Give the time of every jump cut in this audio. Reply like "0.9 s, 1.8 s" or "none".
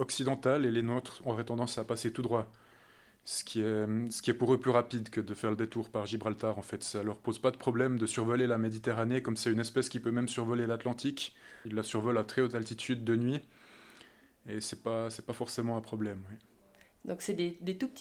none